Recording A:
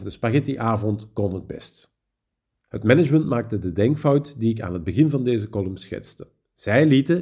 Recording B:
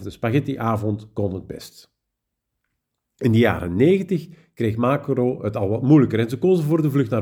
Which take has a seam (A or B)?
A